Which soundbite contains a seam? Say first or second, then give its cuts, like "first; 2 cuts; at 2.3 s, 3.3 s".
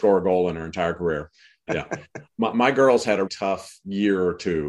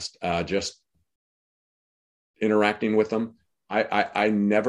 first; 2 cuts; at 1.7 s, 3.3 s